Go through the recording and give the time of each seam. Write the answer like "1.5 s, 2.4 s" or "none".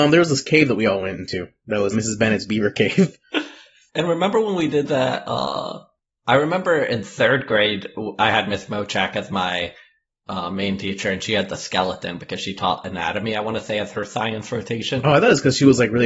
1.9 s